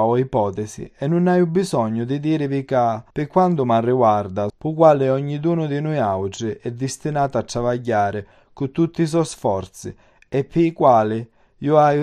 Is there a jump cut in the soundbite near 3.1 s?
yes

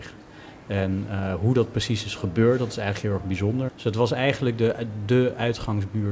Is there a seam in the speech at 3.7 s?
yes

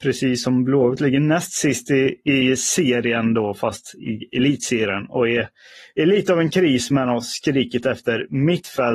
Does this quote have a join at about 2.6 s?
no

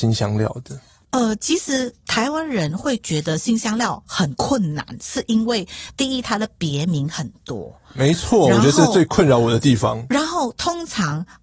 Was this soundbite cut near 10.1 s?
no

